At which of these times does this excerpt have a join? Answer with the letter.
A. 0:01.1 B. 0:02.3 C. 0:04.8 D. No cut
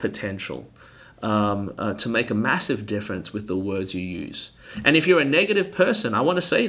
D